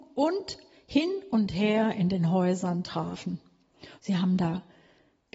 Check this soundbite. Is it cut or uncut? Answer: cut